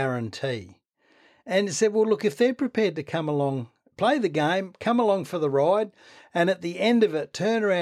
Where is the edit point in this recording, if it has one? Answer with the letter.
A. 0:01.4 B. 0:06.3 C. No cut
C